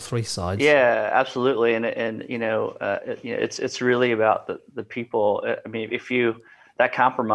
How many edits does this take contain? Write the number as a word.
zero